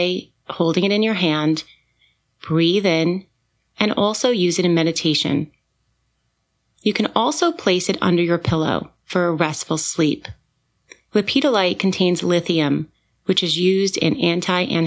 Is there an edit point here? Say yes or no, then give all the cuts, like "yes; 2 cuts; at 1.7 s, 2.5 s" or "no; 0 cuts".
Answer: no; 0 cuts